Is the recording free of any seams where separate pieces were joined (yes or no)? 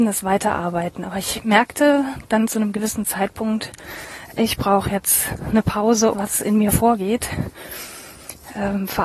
no